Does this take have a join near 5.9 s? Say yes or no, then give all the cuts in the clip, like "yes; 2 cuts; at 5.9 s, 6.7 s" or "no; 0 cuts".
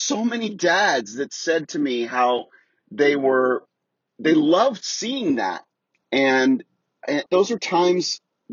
yes; 2 cuts; at 5.9 s, 7.3 s